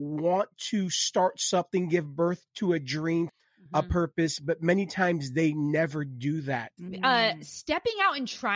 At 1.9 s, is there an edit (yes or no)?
no